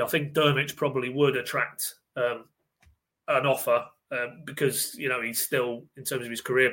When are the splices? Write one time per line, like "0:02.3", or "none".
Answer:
none